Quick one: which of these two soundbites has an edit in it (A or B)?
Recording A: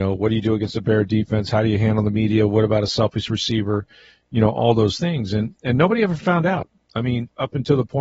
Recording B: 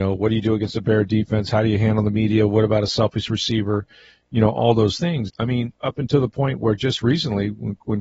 B